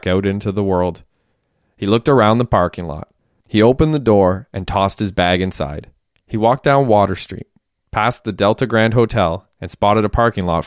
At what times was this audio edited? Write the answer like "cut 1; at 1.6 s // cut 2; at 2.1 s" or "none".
cut 1; at 3.4 s // cut 2; at 6.2 s

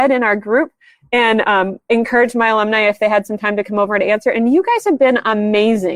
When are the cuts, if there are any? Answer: none

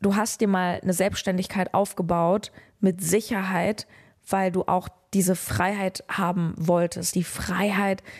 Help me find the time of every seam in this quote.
none

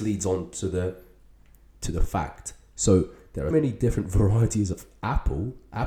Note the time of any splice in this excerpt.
cut 1; at 3.5 s

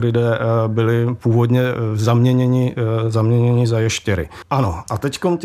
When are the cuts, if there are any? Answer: cut 1; at 4.4 s

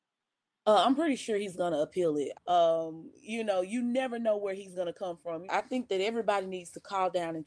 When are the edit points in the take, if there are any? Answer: cut 1; at 2.3 s // cut 2; at 5.5 s

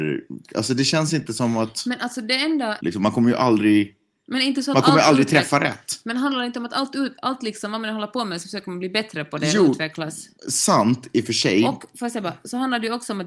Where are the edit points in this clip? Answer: cut 1; at 2.8 s // cut 2; at 10.4 s

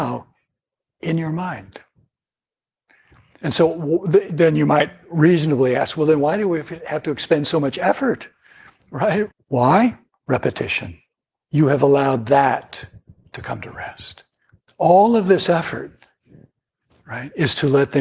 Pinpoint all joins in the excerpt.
cut 1; at 9.3 s // cut 2; at 11.4 s // cut 3; at 14.7 s

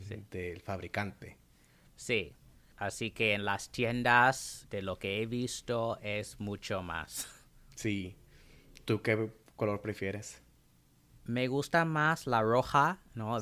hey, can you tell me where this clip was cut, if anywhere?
none

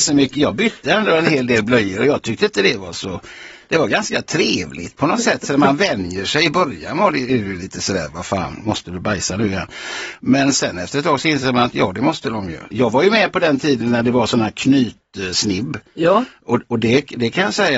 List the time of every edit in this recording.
cut 1; at 12.7 s

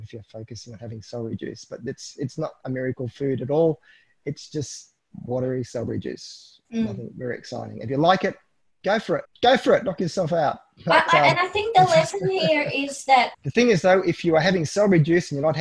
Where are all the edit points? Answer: cut 1; at 9.2 s // cut 2; at 13.3 s

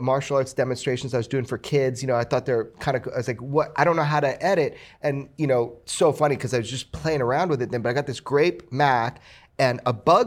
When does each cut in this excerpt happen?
none

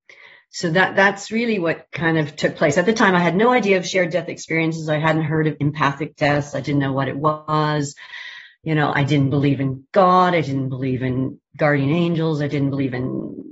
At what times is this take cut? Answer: none

